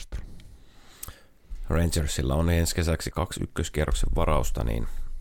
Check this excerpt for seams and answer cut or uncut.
cut